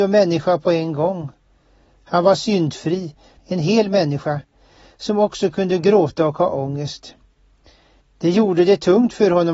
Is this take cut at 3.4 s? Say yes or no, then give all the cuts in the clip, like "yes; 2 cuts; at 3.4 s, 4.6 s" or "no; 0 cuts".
yes; 2 cuts; at 3.4 s, 8.0 s